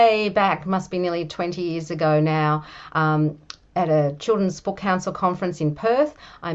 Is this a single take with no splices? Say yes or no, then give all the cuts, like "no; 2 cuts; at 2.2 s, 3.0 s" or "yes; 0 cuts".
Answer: yes; 0 cuts